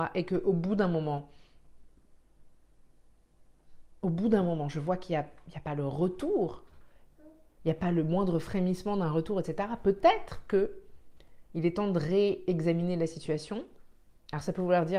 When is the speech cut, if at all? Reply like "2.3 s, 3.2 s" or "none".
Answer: none